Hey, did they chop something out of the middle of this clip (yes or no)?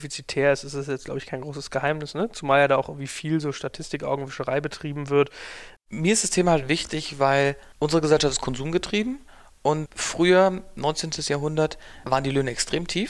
yes